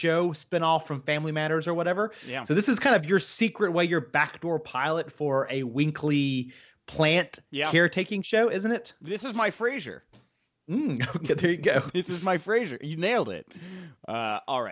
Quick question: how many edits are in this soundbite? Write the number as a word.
zero